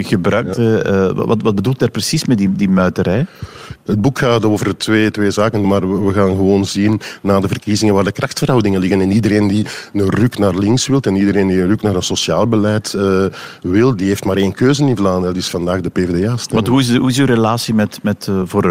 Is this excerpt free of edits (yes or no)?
no